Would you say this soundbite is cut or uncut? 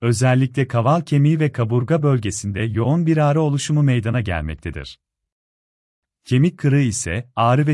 uncut